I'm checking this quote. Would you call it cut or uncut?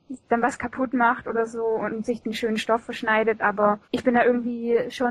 cut